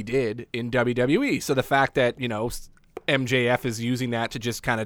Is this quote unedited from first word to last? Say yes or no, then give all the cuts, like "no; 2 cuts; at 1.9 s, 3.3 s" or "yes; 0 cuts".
yes; 0 cuts